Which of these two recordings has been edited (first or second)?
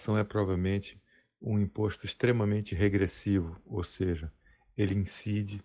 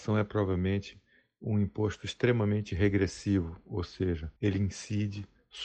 second